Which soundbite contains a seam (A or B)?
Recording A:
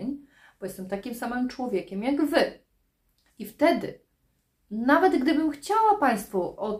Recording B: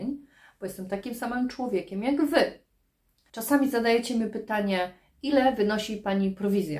B